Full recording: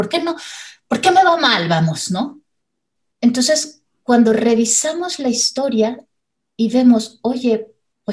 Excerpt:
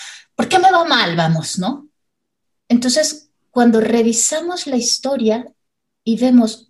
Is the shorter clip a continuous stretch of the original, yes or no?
yes